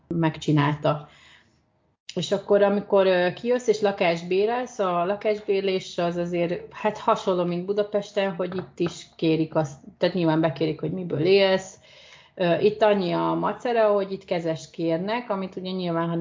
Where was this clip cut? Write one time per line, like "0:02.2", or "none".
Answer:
0:08.4